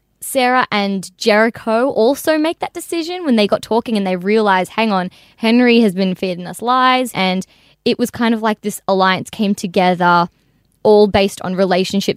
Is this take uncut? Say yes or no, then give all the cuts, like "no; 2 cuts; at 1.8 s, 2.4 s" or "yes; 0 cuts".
no; 1 cut; at 7.1 s